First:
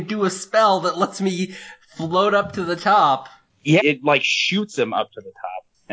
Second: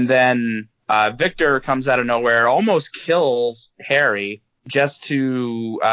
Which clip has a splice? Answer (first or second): first